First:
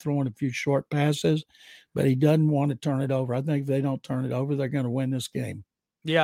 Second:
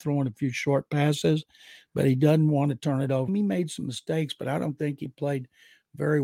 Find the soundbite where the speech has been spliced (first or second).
second